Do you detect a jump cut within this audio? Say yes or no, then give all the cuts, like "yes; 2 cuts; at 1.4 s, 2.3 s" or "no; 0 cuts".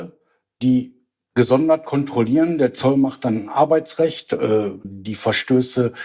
yes; 1 cut; at 4.8 s